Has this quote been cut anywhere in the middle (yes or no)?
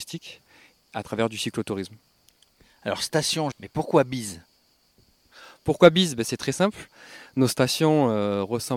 yes